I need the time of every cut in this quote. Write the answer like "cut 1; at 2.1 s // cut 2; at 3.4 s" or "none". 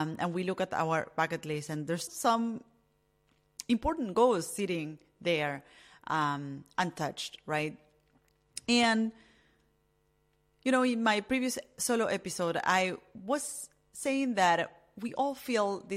cut 1; at 2.1 s